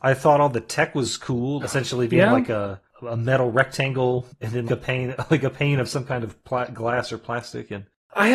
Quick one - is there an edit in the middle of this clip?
yes; 2 cuts; at 1.6 s, 4.7 s

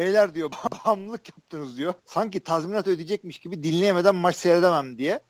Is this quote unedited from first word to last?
no; 1 cut; at 2.0 s

